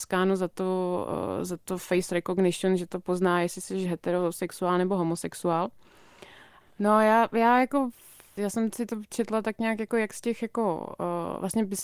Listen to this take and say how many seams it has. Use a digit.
1